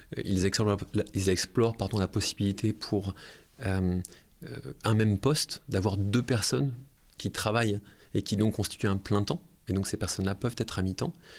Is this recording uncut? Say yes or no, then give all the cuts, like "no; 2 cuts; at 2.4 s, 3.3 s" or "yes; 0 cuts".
yes; 0 cuts